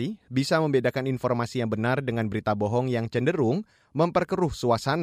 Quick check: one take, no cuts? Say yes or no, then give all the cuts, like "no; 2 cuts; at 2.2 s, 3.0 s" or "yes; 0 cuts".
yes; 0 cuts